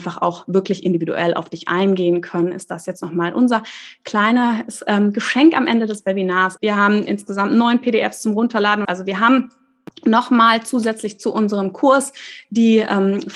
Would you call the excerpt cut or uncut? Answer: cut